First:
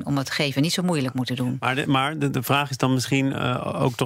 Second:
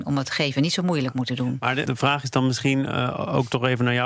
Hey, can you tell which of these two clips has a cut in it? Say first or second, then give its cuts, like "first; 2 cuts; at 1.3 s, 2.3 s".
second; 1 cut; at 1.9 s